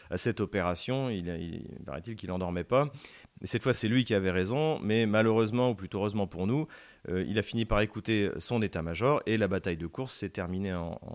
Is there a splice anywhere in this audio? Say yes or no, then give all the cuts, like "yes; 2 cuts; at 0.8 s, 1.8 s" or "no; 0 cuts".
no; 0 cuts